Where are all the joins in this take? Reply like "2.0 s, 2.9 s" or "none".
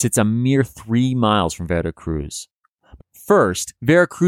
3.0 s